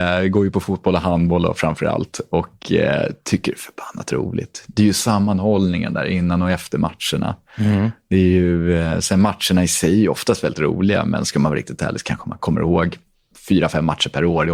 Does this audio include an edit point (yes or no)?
no